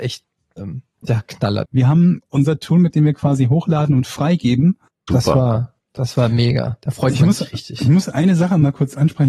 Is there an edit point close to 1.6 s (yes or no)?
yes